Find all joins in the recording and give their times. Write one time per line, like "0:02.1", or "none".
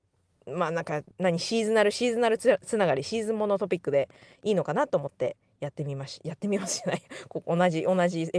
0:01.1